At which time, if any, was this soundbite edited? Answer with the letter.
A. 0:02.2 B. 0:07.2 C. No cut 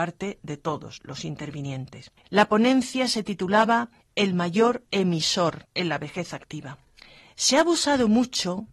A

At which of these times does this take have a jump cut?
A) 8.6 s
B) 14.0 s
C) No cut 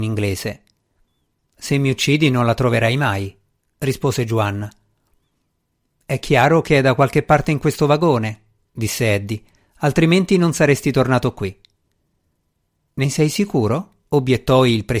B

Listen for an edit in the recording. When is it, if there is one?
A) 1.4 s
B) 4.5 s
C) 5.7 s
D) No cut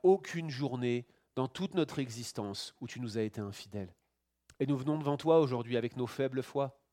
B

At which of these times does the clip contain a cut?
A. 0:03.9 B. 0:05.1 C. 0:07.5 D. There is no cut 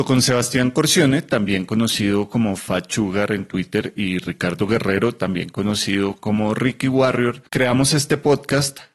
C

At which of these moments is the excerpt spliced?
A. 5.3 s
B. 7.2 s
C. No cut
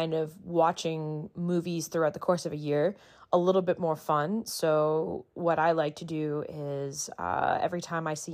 C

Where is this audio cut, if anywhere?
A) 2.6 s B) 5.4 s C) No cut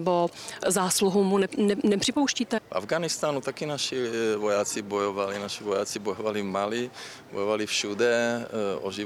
A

